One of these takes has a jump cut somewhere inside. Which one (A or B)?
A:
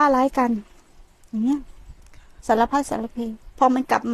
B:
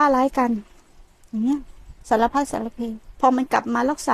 B